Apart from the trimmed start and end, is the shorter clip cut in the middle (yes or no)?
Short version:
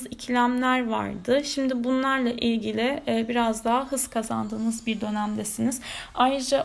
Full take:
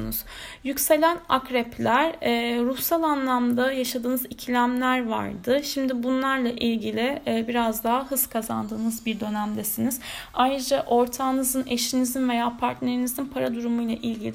no